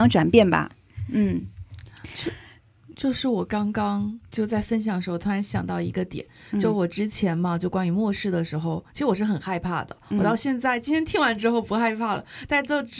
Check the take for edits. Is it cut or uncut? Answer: uncut